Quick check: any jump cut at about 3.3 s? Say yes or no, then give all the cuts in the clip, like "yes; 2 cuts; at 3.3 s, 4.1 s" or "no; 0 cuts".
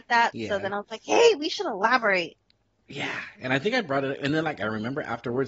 no; 0 cuts